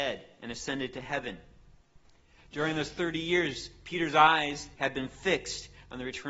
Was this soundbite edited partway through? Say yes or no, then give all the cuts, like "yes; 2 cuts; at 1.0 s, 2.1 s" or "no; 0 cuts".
yes; 1 cut; at 4.7 s